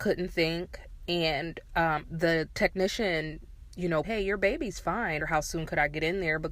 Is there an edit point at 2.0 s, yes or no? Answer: yes